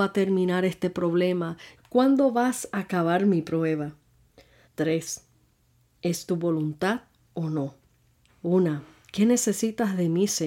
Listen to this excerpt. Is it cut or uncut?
cut